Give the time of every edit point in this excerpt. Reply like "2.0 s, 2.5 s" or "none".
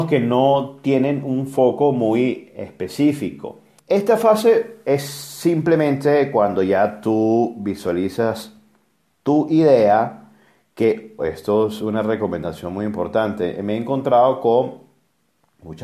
3.8 s, 11.2 s